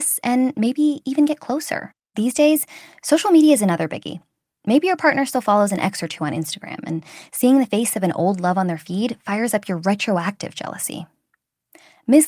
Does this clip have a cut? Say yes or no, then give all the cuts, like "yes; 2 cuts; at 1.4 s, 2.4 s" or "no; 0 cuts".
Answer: yes; 1 cut; at 2.1 s